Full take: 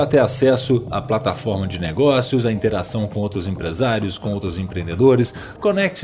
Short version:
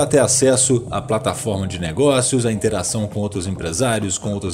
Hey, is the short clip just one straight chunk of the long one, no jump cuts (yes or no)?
yes